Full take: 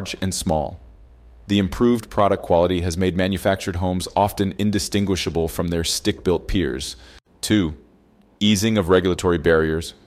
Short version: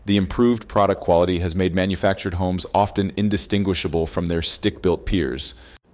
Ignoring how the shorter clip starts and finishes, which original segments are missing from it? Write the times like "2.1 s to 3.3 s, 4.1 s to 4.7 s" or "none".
none